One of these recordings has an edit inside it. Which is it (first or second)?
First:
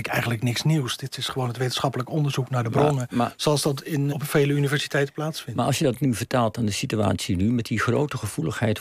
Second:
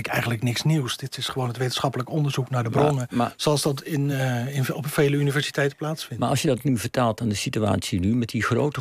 first